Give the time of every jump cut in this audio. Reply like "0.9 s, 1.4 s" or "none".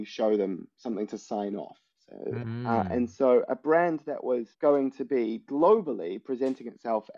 2.4 s, 4.5 s